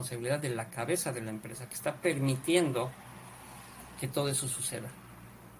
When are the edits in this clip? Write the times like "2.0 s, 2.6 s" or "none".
none

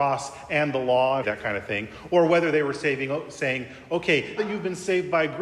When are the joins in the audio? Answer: 1.2 s, 4.4 s

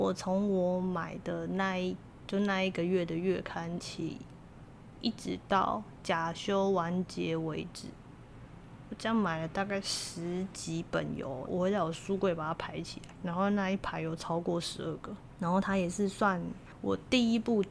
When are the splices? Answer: 11.5 s, 15.4 s

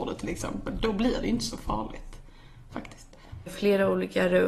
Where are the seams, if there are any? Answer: 3.5 s

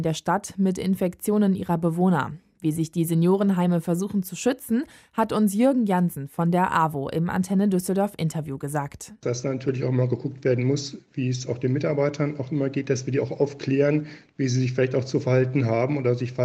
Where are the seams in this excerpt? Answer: none

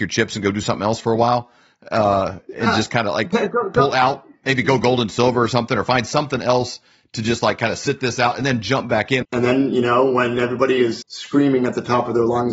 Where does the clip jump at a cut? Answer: 9.2 s, 11.0 s

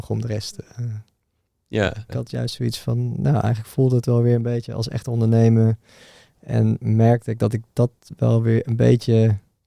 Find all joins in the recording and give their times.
2.1 s

